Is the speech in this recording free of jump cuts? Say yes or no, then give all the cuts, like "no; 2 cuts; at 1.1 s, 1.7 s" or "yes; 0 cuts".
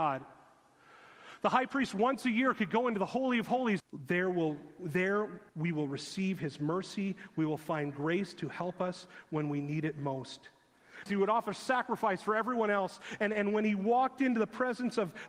no; 3 cuts; at 3.8 s, 5.5 s, 11.1 s